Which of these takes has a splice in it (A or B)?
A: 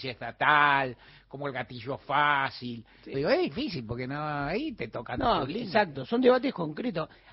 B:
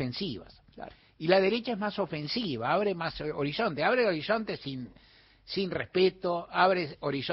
A